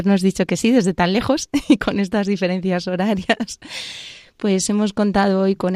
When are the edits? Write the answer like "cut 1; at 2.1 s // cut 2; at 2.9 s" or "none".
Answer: none

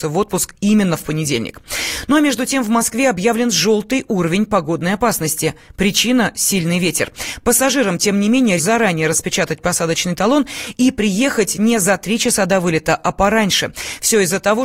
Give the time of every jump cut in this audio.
cut 1; at 7.4 s // cut 2; at 8.6 s

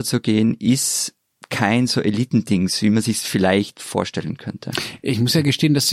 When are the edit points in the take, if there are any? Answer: none

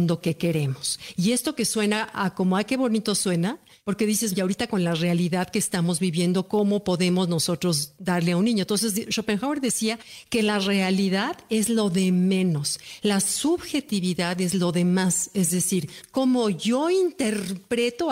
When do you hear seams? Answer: cut 1; at 4.3 s

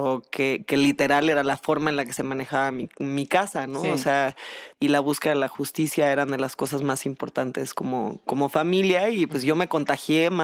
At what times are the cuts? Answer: cut 1; at 4.7 s

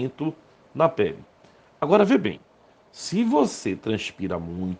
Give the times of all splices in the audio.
none

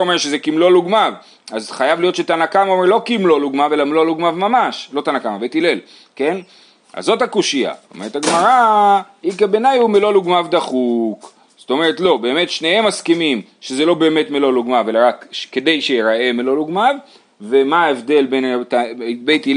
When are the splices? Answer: cut 1; at 7.8 s

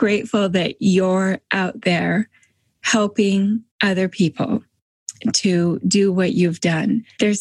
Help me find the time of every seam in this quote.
cut 1; at 3.7 s

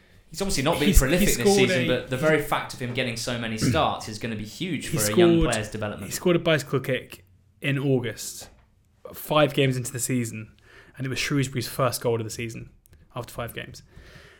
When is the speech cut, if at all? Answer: none

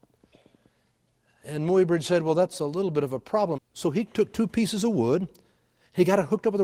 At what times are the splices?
cut 1; at 3.6 s

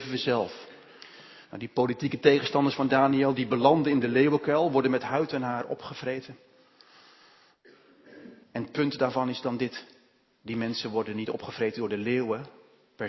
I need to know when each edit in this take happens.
cut 1; at 8.4 s

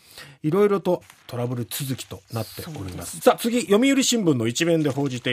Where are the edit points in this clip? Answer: cut 1; at 1.0 s // cut 2; at 3.2 s

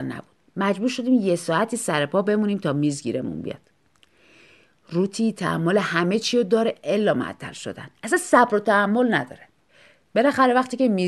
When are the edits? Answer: none

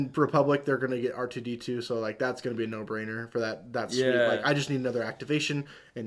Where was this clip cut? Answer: none

